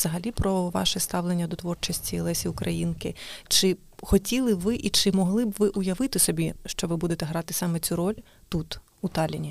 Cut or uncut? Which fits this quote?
uncut